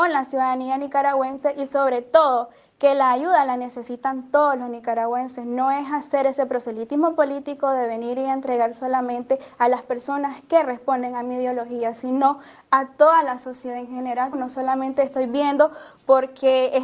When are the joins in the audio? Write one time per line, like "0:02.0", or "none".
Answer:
0:14.3